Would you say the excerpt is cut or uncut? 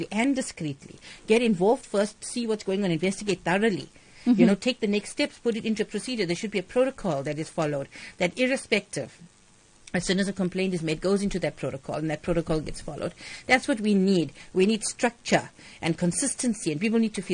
uncut